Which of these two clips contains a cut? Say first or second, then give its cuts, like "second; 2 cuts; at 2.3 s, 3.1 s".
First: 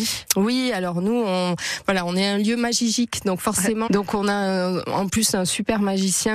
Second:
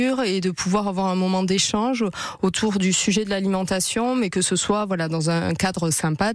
first; 1 cut; at 3.9 s